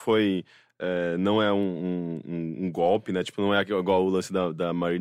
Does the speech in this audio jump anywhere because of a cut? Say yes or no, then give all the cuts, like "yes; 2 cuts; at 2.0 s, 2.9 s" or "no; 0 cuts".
no; 0 cuts